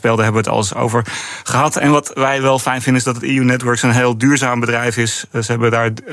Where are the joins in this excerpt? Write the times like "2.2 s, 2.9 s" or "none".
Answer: none